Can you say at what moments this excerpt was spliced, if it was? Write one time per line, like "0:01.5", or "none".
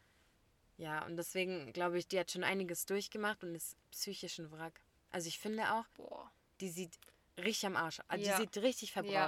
0:03.8
0:05.9